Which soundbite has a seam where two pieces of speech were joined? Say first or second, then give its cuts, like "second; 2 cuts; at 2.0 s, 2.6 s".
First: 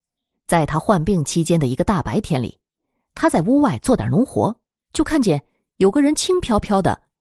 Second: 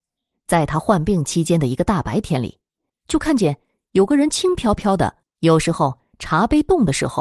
second; 2 cuts; at 2.9 s, 5.2 s